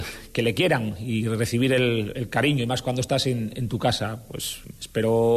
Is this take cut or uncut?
uncut